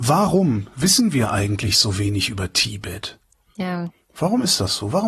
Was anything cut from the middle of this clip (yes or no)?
no